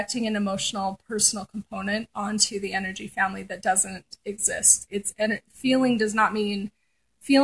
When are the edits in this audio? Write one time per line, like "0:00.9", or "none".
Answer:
0:04.9